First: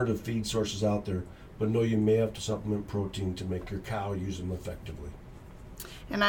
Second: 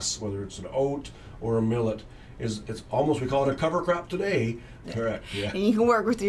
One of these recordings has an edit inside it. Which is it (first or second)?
second